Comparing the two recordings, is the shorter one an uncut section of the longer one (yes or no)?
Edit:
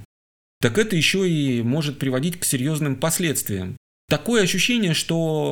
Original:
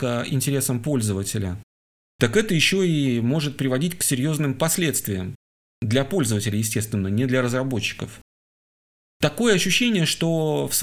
no